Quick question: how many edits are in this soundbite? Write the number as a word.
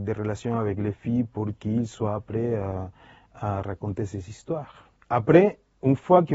zero